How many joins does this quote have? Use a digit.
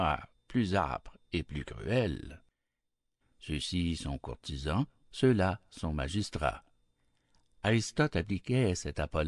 1